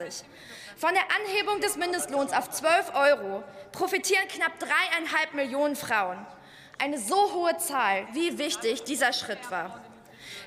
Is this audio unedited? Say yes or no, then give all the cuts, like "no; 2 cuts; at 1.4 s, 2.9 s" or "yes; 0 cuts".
no; 1 cut; at 8.1 s